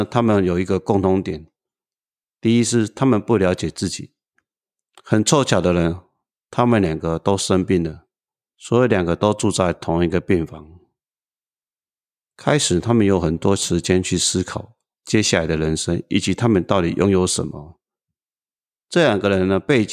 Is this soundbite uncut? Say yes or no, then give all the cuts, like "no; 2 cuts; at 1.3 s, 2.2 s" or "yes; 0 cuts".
no; 2 cuts; at 4.9 s, 8.5 s